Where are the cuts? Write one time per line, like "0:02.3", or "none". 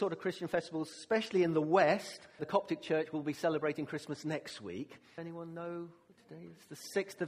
0:02.4
0:05.2